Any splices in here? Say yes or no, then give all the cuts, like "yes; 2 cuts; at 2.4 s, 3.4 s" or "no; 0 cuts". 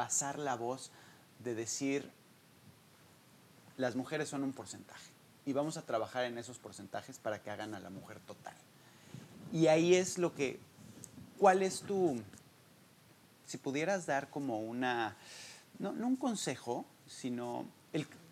no; 0 cuts